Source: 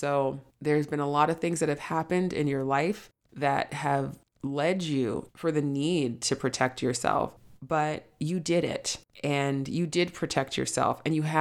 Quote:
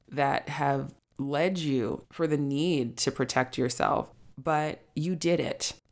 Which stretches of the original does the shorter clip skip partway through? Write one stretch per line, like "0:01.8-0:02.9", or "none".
none